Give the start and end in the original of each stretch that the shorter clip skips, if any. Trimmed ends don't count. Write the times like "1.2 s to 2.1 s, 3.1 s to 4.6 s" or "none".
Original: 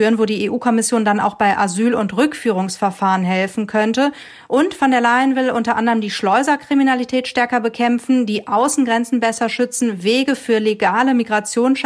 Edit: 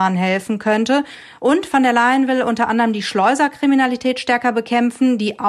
none